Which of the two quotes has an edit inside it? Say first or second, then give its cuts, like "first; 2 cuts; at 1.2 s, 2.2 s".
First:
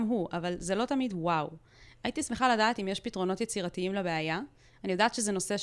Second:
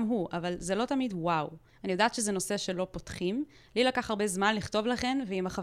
second; 1 cut; at 1.7 s